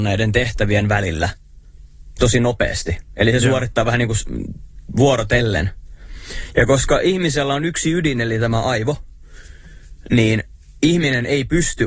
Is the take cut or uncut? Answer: uncut